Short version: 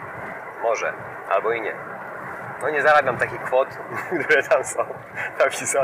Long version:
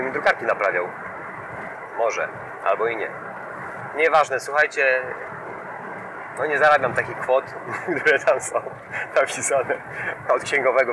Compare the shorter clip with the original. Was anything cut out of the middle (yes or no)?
yes